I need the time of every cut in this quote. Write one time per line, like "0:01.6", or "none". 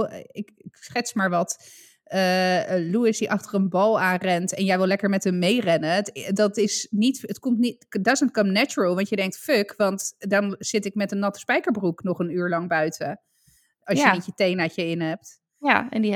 none